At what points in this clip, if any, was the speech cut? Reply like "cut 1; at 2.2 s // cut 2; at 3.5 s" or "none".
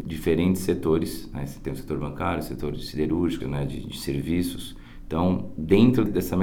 cut 1; at 3.4 s